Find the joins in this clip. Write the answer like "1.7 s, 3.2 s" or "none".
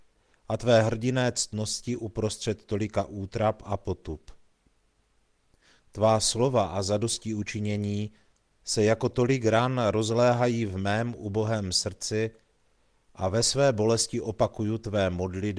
none